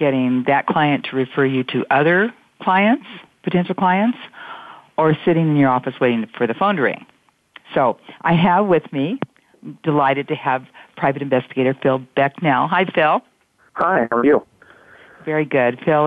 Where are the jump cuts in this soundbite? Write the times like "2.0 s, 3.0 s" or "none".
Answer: none